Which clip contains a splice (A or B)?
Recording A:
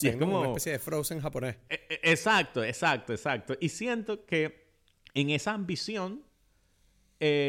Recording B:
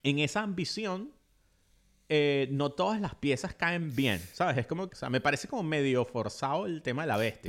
B